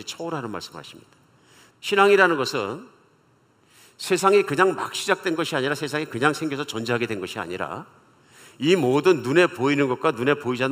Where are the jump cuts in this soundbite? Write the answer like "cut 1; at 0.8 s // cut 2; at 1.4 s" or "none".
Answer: cut 1; at 1.7 s